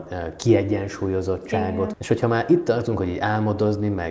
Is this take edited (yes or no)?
yes